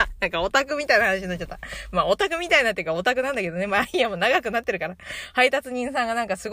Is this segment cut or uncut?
uncut